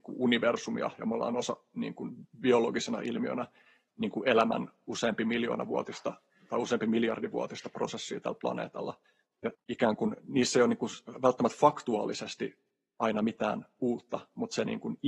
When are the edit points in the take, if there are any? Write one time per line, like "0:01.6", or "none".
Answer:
0:09.5